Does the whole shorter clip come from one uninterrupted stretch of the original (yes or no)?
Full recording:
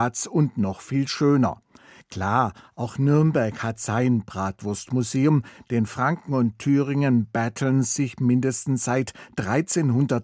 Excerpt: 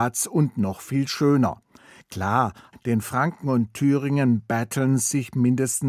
no